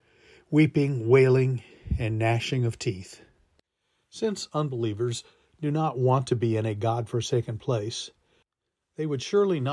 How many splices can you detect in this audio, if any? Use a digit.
0